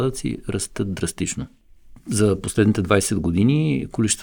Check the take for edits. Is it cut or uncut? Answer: uncut